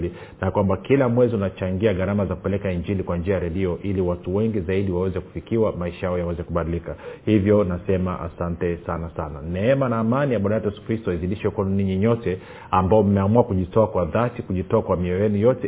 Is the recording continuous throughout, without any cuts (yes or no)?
yes